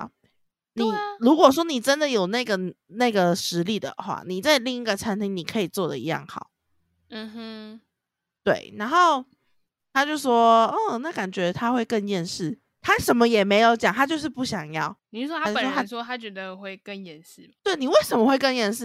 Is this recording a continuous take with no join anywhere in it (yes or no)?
yes